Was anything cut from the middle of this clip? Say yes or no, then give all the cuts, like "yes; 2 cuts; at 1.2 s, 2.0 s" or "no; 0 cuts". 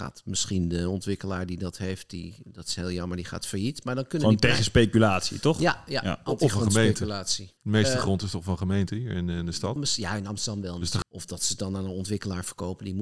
yes; 3 cuts; at 7.6 s, 9.8 s, 11.0 s